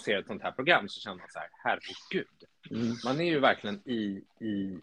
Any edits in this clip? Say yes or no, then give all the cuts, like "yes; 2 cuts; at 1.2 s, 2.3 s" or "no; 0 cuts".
yes; 1 cut; at 3.8 s